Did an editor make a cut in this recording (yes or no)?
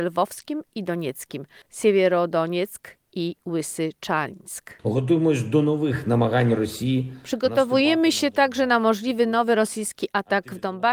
yes